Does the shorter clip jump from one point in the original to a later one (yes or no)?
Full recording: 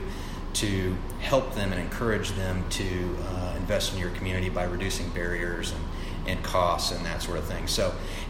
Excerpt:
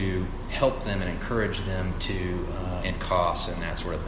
yes